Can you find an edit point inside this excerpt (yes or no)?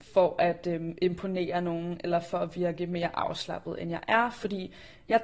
no